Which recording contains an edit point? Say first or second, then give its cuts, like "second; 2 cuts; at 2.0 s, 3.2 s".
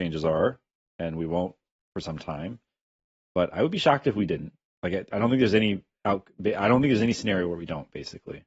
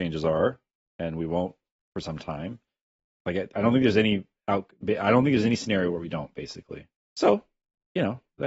second; 2 cuts; at 3.1 s, 7.0 s